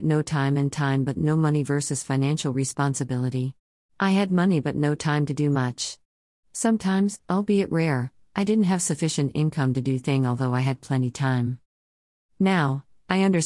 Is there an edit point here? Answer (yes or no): yes